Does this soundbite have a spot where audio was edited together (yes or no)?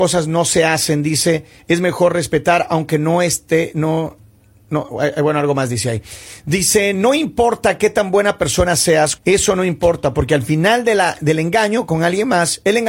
yes